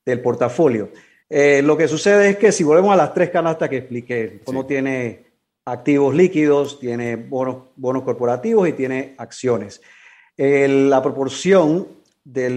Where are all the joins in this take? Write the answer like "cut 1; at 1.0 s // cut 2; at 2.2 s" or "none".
cut 1; at 1.2 s